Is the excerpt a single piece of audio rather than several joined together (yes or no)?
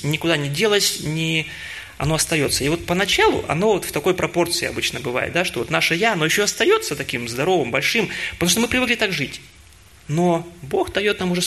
no